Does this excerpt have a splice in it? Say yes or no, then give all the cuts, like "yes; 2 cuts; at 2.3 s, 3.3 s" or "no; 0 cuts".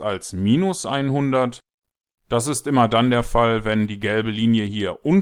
no; 0 cuts